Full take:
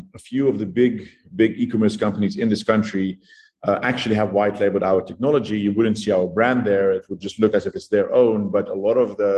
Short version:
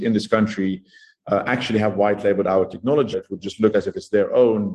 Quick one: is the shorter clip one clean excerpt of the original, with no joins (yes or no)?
no